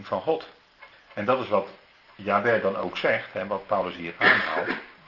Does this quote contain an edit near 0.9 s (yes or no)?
yes